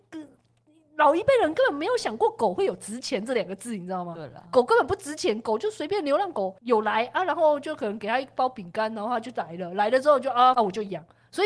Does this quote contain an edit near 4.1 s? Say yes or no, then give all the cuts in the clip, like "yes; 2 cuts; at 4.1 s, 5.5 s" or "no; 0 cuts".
no; 2 cuts; at 6.6 s, 10.5 s